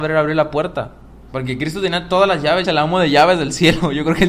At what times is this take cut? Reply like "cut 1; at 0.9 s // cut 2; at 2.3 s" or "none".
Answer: cut 1; at 1.3 s // cut 2; at 2.6 s